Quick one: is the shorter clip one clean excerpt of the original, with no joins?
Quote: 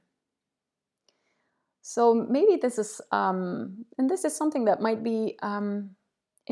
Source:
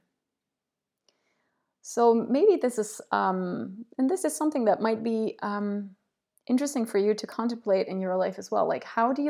yes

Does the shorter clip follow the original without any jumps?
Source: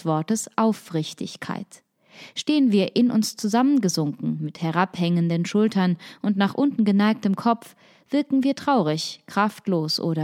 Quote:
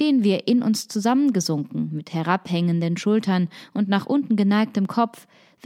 yes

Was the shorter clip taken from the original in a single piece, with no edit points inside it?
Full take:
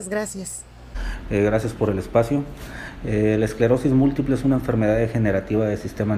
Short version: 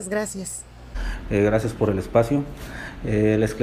yes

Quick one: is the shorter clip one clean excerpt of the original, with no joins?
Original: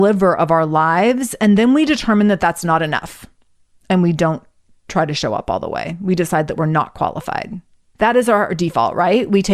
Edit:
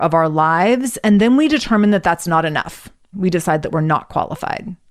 no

